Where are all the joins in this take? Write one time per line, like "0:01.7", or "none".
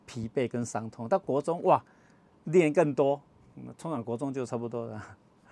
none